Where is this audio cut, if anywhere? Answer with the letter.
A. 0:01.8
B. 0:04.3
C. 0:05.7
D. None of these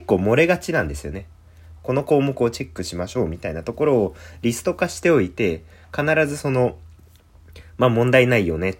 A